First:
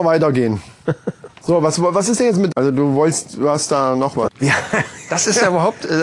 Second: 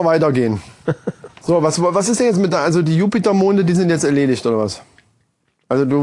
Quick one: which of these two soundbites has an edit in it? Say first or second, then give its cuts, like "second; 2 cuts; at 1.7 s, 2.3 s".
first; 2 cuts; at 2.5 s, 4.3 s